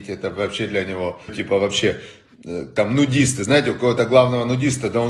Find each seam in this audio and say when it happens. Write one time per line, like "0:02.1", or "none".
0:01.3